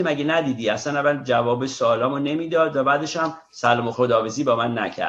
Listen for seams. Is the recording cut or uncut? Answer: cut